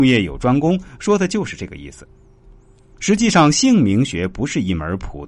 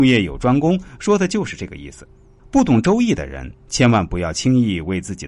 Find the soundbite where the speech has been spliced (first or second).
second